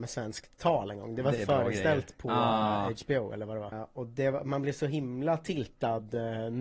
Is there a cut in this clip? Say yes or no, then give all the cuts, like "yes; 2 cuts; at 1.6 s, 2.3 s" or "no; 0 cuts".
yes; 1 cut; at 3.7 s